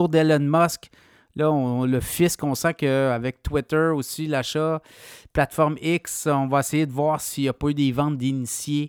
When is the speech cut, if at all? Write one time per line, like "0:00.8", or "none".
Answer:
none